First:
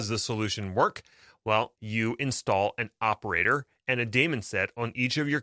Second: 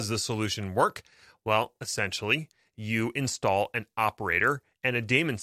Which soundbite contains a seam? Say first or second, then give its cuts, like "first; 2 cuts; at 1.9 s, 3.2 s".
first; 1 cut; at 1.8 s